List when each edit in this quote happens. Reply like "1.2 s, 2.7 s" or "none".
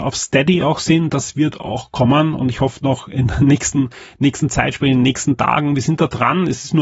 none